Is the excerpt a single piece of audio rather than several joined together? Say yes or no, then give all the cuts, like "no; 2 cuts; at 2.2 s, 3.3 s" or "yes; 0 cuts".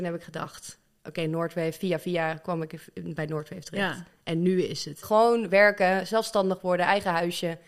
no; 1 cut; at 5.0 s